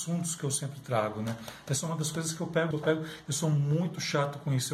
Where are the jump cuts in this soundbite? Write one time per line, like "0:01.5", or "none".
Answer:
0:02.7

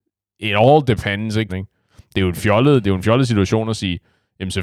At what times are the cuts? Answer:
0:01.5

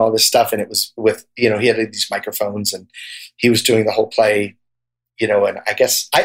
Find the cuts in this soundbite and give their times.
none

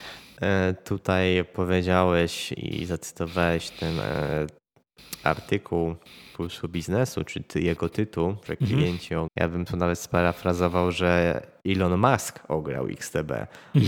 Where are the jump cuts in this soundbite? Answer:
0:09.3

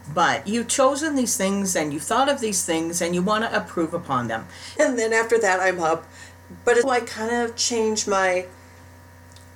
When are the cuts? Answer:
0:04.8
0:06.8

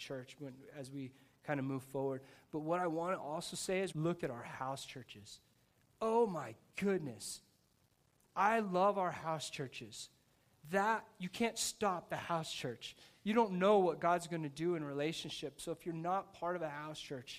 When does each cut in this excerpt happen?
0:03.9

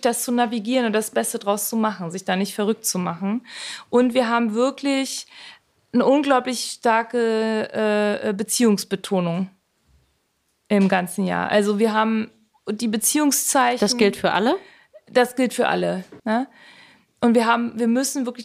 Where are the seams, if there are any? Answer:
0:16.2

